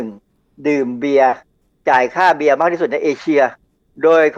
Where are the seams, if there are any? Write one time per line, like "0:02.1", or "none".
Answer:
none